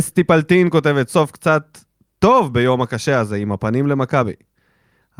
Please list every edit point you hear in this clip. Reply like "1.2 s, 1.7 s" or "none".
1.1 s